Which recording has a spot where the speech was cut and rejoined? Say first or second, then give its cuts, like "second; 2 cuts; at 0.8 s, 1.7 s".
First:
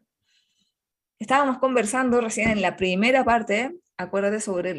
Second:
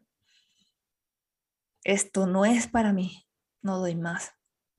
first; 1 cut; at 1.2 s